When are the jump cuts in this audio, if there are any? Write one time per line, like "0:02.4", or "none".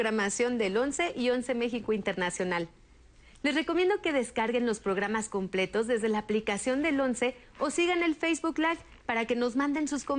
none